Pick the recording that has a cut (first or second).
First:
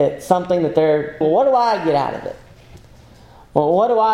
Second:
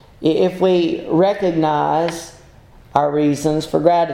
first